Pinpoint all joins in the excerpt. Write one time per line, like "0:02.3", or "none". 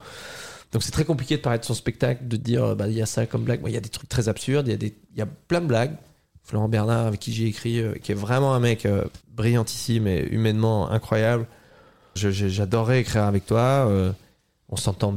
0:09.2
0:12.2